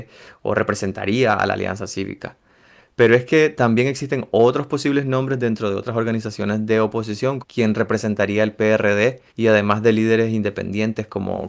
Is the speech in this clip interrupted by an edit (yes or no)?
yes